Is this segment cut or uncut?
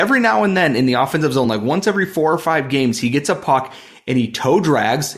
uncut